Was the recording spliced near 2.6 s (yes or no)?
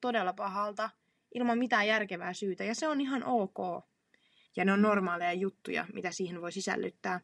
yes